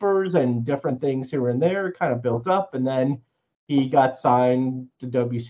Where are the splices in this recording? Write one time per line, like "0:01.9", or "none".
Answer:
none